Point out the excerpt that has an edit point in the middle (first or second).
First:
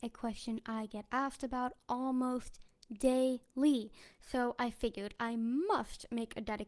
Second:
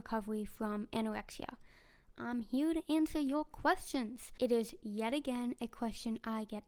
second